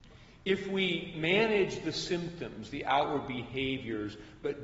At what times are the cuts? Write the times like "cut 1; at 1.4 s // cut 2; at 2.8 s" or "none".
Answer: none